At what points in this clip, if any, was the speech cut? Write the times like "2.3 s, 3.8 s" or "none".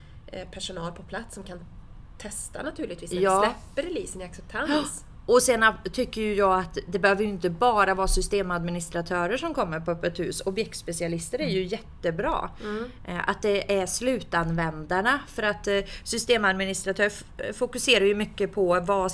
none